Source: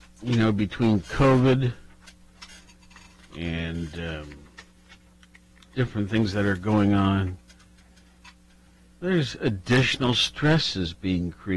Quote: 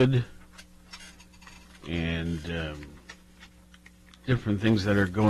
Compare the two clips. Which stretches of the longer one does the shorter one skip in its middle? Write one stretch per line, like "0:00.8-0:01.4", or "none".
none